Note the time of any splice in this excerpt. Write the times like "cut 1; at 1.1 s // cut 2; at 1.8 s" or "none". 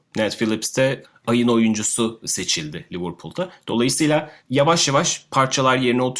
none